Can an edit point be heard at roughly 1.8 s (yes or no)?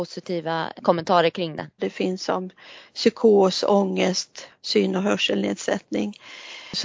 yes